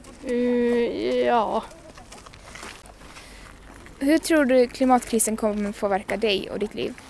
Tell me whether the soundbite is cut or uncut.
uncut